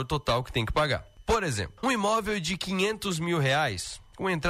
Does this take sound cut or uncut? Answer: cut